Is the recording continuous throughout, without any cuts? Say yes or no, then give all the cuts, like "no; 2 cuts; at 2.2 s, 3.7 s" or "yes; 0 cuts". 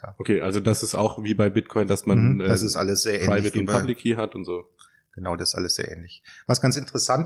yes; 0 cuts